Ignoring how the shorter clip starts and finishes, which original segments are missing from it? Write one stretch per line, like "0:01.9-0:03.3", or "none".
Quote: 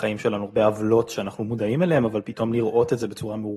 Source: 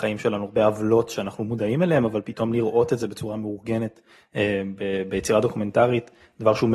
none